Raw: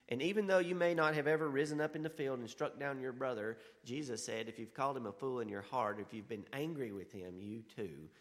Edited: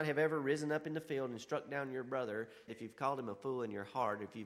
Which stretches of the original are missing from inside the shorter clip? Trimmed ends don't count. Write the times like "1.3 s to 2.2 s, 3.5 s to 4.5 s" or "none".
3.8 s to 4.5 s

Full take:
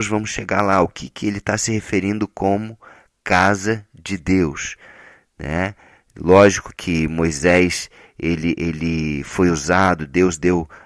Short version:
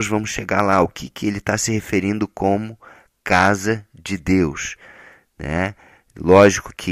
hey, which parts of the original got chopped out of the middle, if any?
none

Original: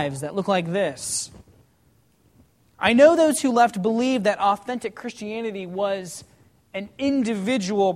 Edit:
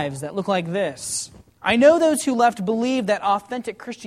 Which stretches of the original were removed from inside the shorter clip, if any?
1.5 s to 2.7 s

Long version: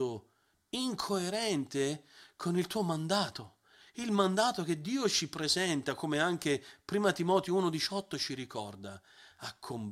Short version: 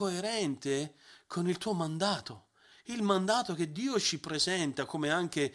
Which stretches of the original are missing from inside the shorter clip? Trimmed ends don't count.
none

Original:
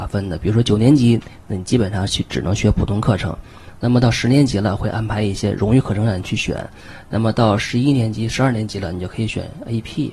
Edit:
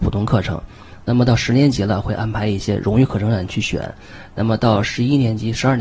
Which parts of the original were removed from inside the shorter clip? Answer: none

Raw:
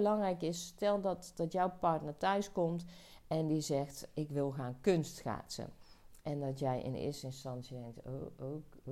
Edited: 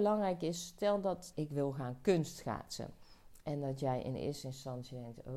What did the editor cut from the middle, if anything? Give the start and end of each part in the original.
1.3 s to 4.1 s

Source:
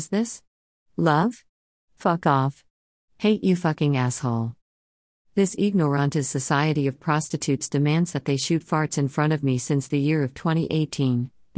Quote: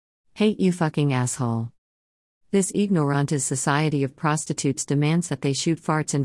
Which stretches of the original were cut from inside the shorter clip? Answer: none

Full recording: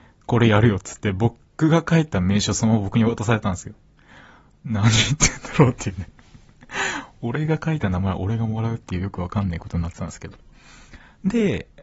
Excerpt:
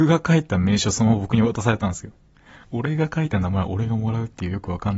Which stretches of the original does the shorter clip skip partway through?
4.3 s to 7.1 s

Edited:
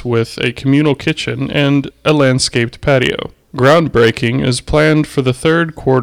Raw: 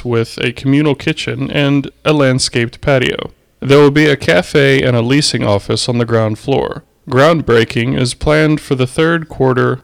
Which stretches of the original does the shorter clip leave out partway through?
3.4 s to 6.9 s

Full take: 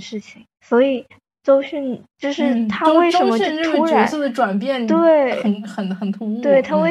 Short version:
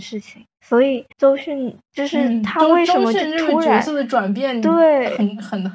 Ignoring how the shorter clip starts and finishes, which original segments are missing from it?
1.1 s to 1.4 s

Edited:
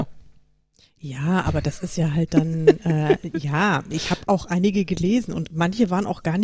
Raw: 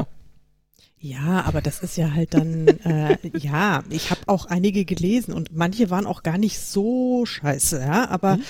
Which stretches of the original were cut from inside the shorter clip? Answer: none

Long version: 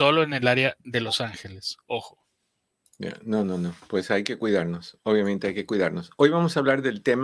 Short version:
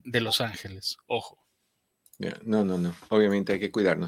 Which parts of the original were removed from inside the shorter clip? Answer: 3.9 s to 5.0 s

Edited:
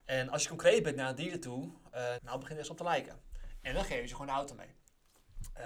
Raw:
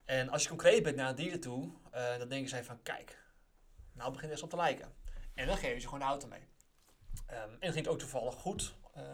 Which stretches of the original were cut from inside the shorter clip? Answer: 2.2 s to 3.9 s

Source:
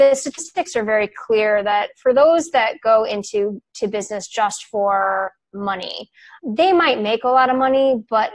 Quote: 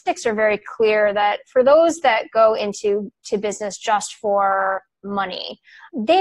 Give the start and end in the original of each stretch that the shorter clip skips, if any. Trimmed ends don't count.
none

